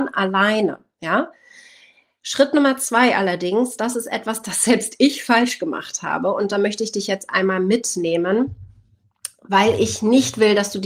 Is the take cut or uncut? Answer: uncut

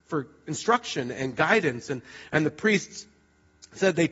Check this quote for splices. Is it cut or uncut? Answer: uncut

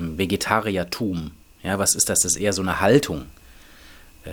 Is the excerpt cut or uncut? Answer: uncut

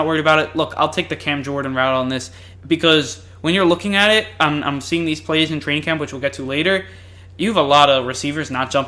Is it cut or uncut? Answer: cut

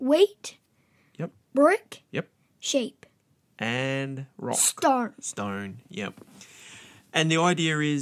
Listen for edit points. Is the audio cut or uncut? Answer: cut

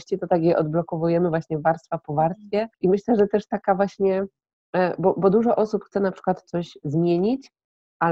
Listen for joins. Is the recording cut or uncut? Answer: cut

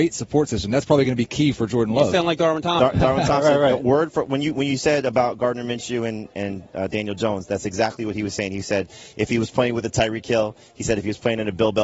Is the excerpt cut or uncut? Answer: uncut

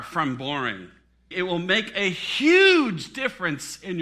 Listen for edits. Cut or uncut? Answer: cut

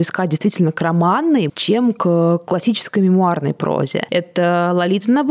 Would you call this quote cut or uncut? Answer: cut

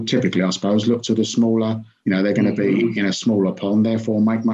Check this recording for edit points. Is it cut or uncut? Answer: cut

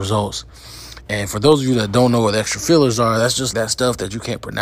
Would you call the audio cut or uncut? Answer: cut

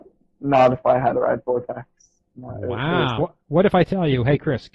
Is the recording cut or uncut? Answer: cut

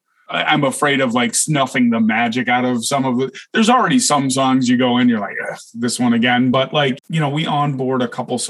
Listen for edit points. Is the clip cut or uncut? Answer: uncut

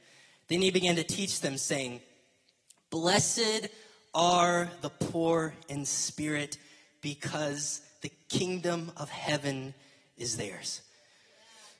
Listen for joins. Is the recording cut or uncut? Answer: uncut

